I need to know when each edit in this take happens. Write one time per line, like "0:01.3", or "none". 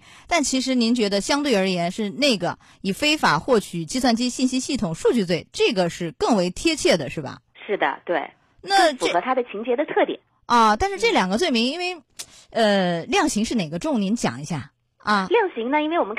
none